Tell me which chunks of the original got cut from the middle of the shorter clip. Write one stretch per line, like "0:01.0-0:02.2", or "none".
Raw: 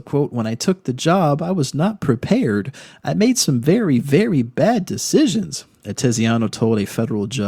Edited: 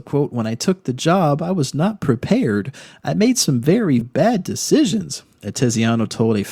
0:04.0-0:04.4